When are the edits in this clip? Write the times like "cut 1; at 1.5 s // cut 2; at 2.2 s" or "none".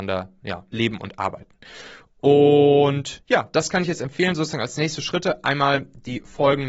none